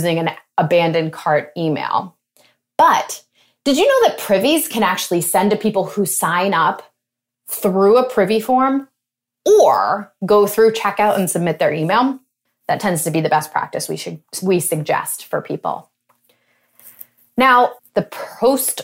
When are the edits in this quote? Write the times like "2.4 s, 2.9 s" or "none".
12.5 s, 17.8 s